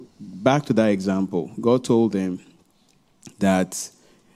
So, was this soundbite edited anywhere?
no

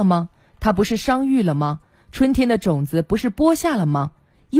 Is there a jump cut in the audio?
no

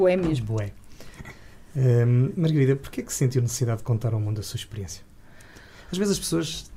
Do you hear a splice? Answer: no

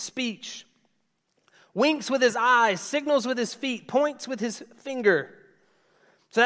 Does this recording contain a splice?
no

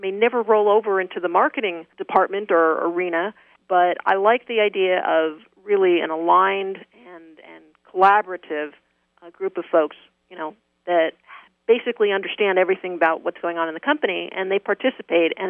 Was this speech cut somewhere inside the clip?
yes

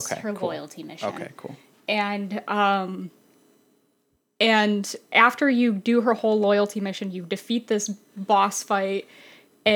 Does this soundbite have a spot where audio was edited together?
no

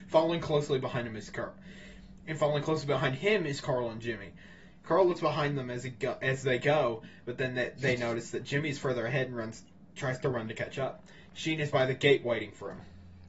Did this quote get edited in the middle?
no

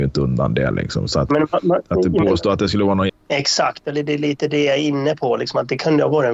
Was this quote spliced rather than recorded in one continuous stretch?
yes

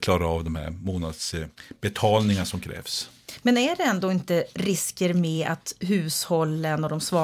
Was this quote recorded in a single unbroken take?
yes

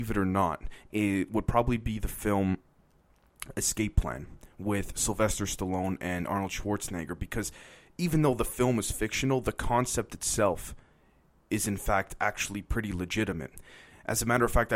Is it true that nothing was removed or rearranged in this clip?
yes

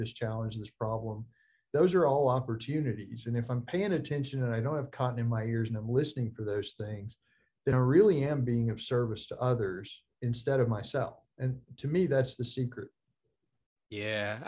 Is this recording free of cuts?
yes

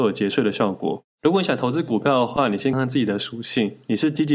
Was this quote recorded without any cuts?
no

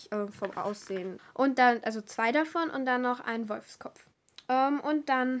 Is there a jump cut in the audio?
yes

